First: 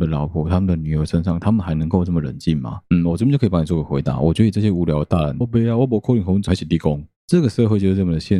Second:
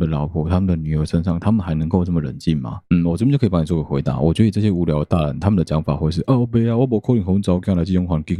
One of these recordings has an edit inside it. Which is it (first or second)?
first